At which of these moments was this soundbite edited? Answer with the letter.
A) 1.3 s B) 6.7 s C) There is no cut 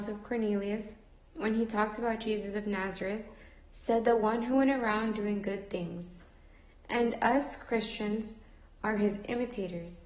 C